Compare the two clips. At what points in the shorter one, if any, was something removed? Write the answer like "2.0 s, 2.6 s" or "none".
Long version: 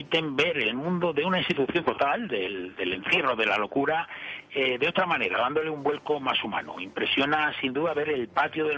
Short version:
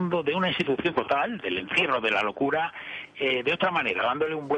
1.4 s